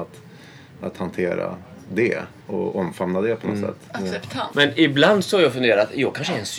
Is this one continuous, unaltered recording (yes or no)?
no